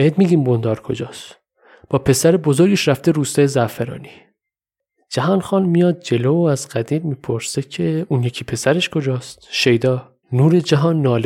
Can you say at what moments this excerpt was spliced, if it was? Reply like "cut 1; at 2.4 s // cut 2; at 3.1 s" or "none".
cut 1; at 10.2 s